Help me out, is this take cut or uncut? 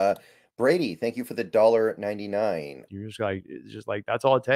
cut